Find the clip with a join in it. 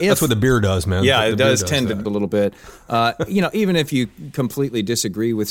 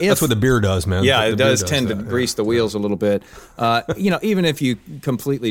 first; 1 cut; at 2.1 s

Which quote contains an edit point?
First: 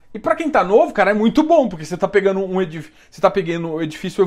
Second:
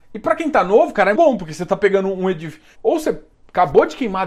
second; 2 cuts; at 1.1 s, 2.7 s

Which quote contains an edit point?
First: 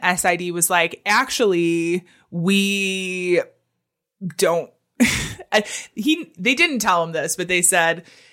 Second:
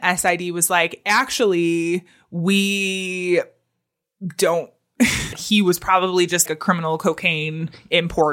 second; 2 cuts; at 5.3 s, 6.5 s

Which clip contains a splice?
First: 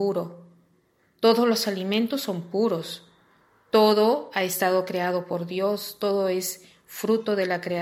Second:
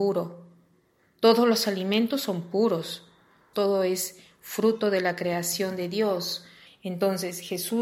second; 2 cuts; at 3.5 s, 6.7 s

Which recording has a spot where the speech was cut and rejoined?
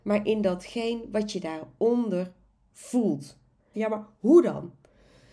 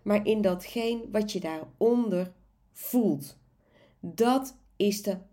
first; 1 cut; at 3.7 s

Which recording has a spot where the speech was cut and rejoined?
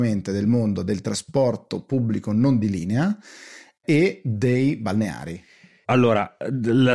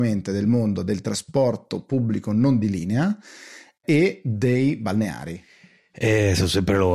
first; 1 cut; at 5.8 s

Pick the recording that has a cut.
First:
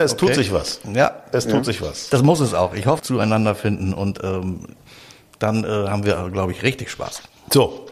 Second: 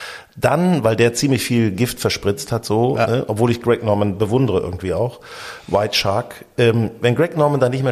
first; 1 cut; at 3.0 s

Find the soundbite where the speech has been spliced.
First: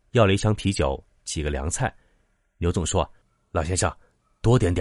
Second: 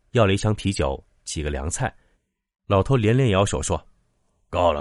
second; 1 cut; at 2.1 s

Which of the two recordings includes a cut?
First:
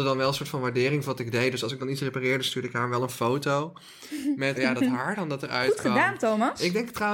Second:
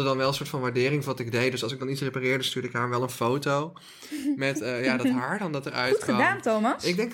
first; 1 cut; at 4.5 s

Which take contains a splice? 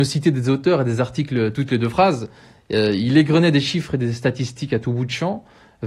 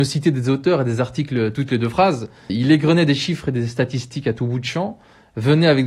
second; 1 cut; at 2.5 s

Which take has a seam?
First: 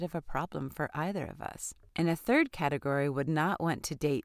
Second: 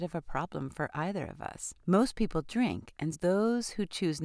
second; 2 cuts; at 1.8 s, 3.1 s

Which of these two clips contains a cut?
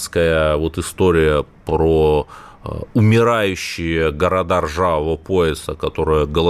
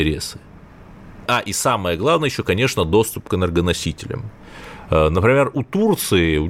second; 1 cut; at 1.3 s

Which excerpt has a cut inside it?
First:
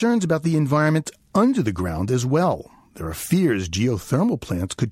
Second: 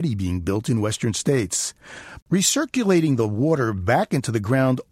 second; 1 cut; at 2.2 s

